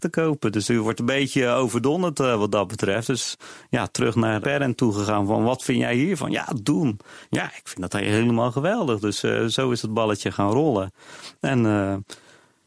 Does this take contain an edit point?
yes; 2 cuts; at 4.4 s, 7.3 s

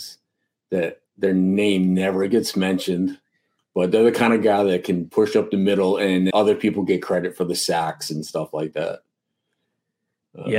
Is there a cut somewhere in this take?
yes; 1 cut; at 6.3 s

